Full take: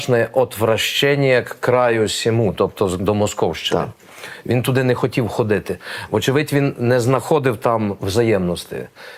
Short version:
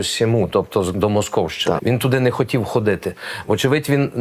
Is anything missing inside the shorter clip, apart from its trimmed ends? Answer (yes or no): yes